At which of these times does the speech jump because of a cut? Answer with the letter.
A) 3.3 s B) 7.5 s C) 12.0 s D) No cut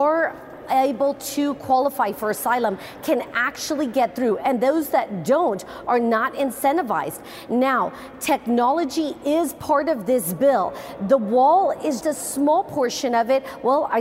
C